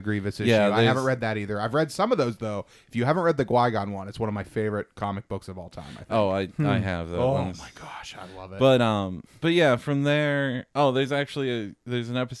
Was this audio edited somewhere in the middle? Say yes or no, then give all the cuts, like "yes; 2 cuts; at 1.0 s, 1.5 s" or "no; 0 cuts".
no; 0 cuts